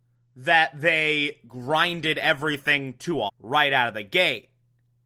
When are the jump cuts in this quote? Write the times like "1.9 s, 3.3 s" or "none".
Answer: 3.3 s

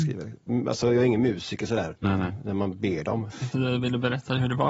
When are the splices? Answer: 2.0 s, 3.5 s

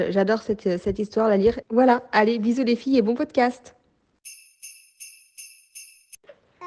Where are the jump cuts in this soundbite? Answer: 1.6 s

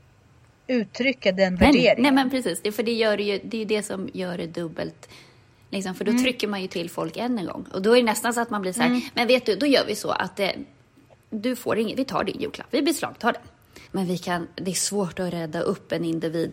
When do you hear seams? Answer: 13.9 s

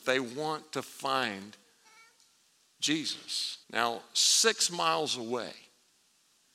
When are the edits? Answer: 3.6 s

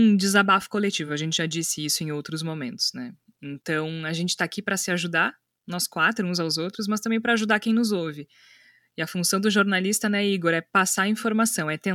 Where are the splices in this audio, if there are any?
none

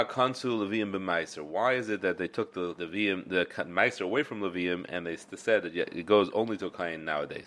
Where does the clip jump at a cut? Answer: 2.8 s

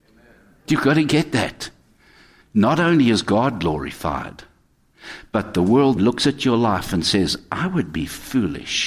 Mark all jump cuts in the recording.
2.4 s, 6.0 s

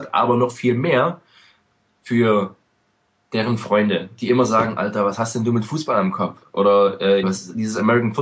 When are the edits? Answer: 7.2 s

